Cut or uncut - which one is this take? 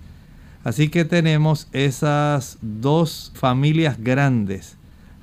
cut